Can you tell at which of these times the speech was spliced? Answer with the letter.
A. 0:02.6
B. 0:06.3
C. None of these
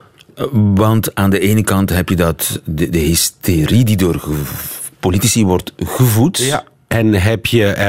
C